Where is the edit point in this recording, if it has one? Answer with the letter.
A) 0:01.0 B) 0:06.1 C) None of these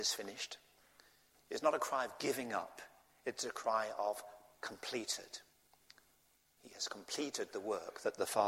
C